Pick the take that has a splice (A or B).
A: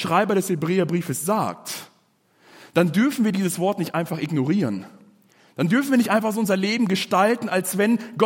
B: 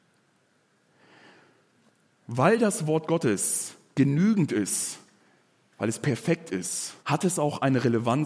B